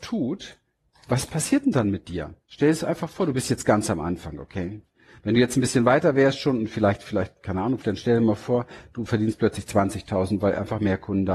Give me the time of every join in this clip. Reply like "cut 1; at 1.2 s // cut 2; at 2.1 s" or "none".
cut 1; at 7.8 s